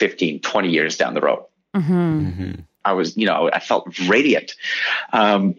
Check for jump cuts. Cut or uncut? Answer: cut